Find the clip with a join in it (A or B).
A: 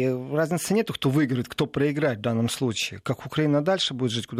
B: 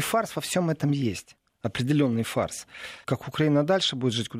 B